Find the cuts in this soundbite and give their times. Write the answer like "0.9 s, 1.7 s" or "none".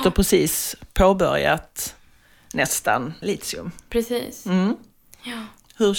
3.2 s